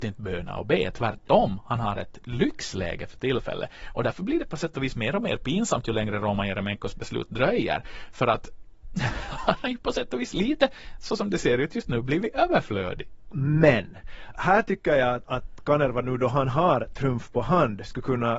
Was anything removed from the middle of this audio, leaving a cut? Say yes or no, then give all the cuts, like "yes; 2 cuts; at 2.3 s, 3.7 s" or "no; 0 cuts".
yes; 2 cuts; at 13.3 s, 14.3 s